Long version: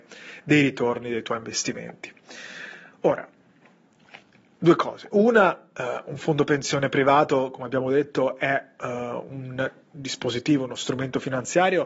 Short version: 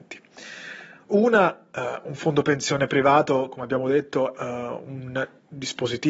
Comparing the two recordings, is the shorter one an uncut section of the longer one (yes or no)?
no